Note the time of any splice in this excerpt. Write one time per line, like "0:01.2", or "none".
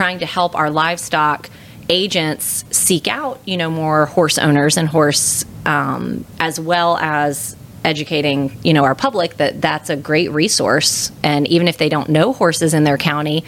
0:06.3

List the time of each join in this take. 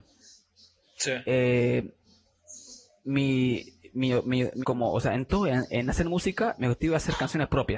0:04.6

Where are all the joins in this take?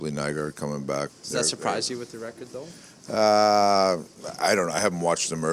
0:01.1

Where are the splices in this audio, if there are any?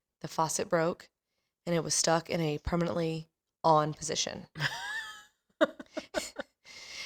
none

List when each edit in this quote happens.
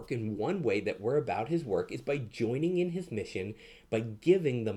none

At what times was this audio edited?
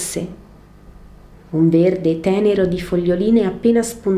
0:01.3

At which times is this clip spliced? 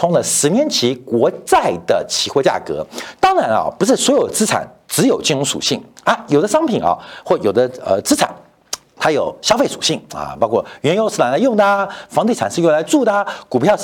0:03.2

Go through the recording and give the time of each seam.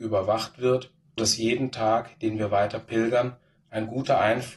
0:01.2

